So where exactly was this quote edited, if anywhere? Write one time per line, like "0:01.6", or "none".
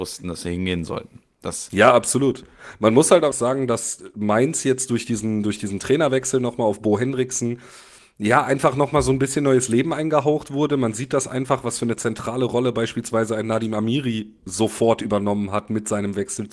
0:03.3